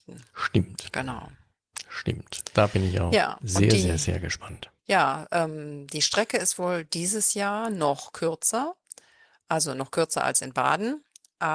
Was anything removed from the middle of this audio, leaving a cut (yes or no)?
yes